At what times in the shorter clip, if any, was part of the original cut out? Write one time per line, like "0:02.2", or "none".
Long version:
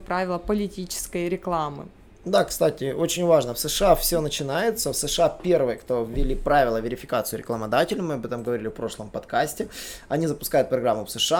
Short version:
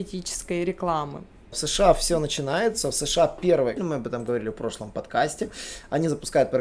0:01.5
0:03.8